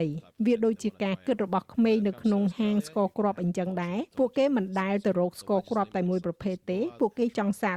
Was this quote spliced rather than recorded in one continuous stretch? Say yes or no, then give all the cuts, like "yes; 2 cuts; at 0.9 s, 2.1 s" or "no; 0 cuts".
yes; 1 cut; at 4.1 s